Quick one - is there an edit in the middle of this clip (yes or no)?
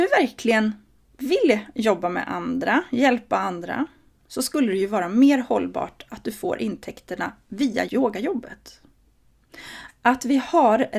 yes